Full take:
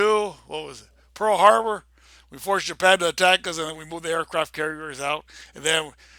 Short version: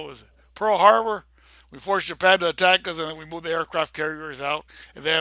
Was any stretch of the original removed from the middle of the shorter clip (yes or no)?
no